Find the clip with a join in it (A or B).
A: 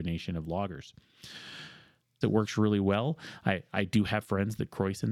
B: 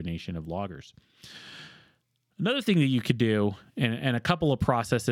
A